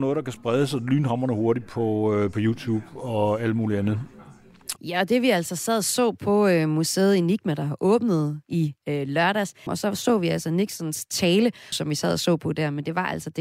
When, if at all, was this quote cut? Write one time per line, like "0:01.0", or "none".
0:04.8
0:09.7
0:11.7